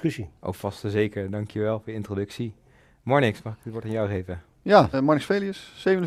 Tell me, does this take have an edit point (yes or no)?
yes